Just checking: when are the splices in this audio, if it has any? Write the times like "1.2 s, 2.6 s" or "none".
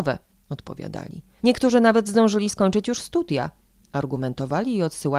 1.4 s